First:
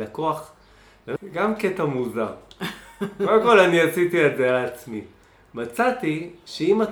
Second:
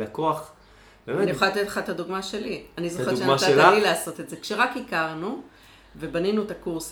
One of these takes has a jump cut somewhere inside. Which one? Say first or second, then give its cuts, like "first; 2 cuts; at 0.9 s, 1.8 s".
first; 1 cut; at 1.2 s